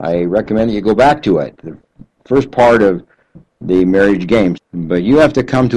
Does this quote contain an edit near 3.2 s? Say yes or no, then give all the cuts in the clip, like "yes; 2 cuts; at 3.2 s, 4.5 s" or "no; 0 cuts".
no; 1 cut; at 4.6 s